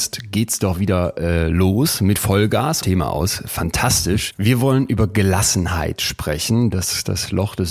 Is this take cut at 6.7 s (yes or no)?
yes